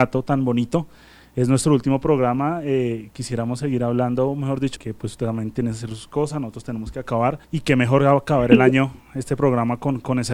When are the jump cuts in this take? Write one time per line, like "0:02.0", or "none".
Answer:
0:01.2
0:04.8
0:07.4